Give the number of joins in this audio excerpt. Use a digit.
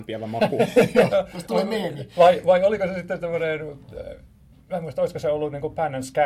1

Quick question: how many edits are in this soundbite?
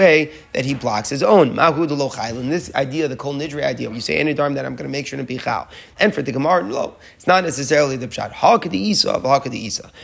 2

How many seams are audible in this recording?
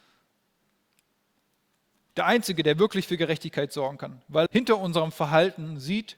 2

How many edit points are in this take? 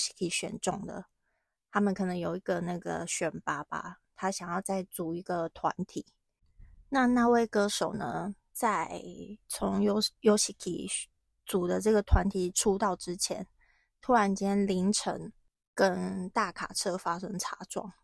0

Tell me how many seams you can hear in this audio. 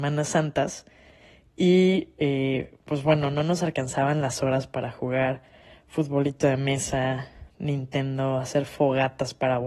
1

